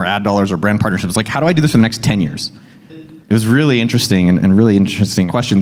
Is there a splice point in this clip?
yes; 1 cut; at 2.9 s

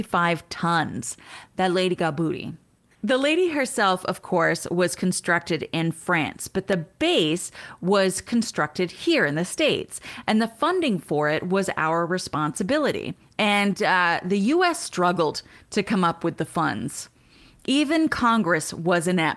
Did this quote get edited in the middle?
no; 0 cuts

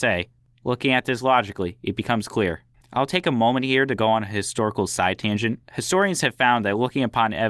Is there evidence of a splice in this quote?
yes; 2 cuts; at 2.7 s, 5.6 s

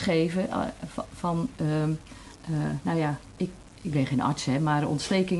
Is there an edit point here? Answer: no; 0 cuts

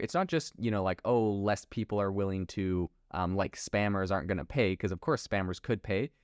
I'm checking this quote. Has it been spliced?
no; 0 cuts

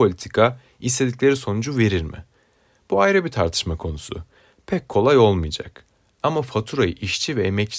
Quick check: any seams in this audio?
no; 0 cuts

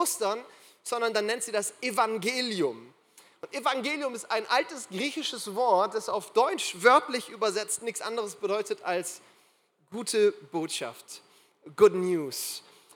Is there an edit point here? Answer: no; 0 cuts

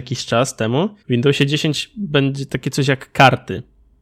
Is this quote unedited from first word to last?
no; 1 cut; at 1.0 s

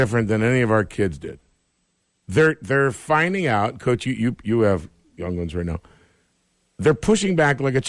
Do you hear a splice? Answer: no; 0 cuts

